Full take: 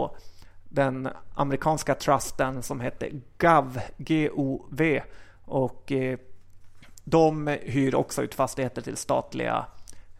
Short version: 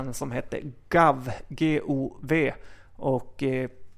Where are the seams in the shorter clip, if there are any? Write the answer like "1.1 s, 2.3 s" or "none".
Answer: none